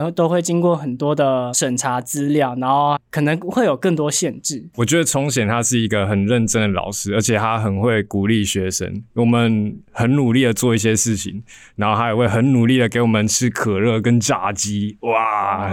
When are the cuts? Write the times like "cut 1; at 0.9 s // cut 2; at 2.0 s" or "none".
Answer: cut 1; at 4.7 s